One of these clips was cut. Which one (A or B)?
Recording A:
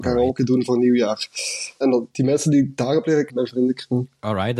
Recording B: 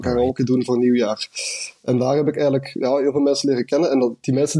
A